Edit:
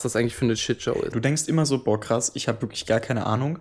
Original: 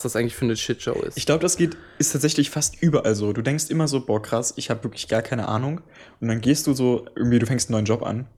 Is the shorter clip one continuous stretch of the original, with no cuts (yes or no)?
no